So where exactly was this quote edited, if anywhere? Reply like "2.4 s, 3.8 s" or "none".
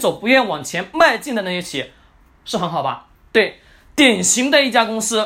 none